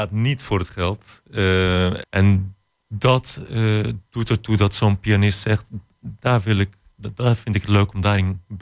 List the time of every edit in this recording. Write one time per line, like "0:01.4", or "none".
0:02.0